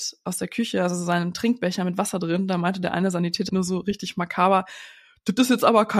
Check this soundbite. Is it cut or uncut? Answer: cut